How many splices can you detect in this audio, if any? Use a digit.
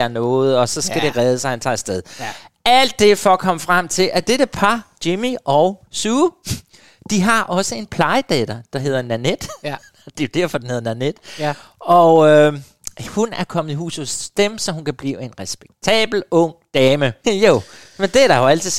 1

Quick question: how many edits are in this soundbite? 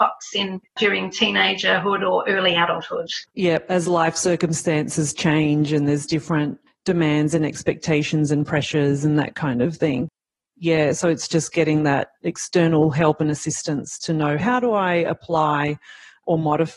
2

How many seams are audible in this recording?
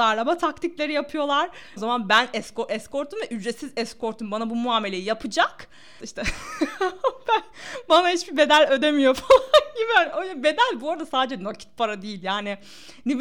2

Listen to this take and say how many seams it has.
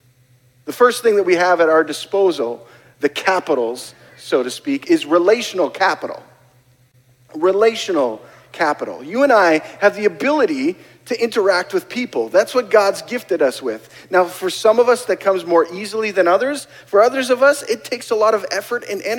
0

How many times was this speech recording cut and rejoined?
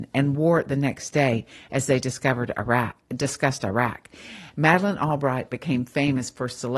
1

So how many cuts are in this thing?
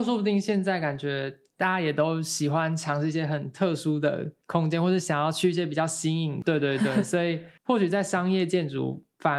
3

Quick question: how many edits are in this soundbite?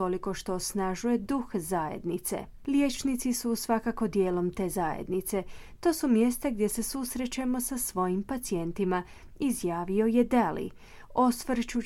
0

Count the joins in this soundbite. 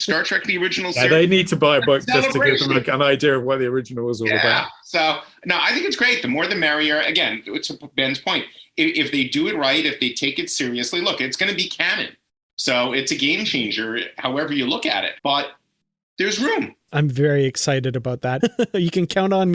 3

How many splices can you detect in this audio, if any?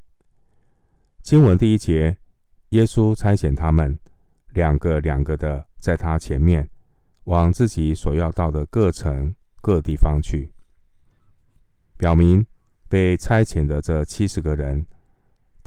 0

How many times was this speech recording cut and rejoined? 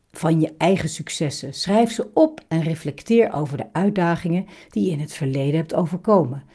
0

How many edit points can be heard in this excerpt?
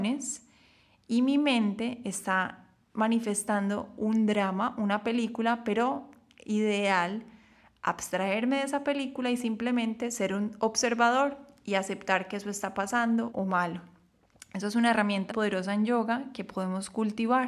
2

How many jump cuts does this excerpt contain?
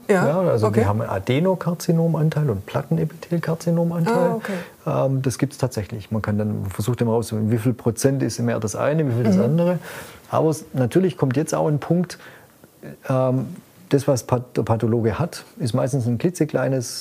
0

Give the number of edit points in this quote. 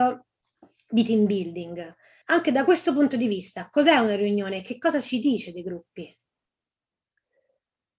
1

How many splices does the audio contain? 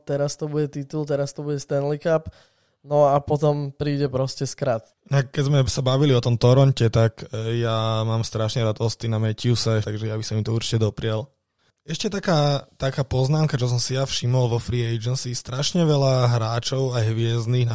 2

